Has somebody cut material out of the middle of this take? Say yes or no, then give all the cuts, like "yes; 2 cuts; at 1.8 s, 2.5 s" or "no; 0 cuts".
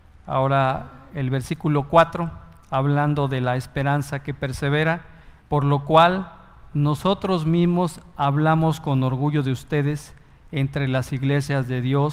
yes; 1 cut; at 5.4 s